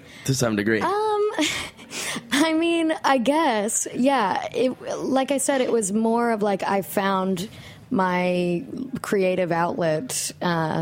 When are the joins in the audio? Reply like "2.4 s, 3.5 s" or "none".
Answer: 3.0 s